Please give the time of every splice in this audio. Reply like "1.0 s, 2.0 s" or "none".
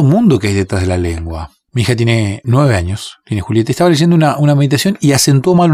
1.7 s